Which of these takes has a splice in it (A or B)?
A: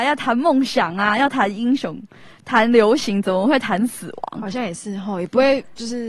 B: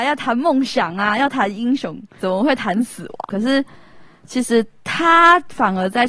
B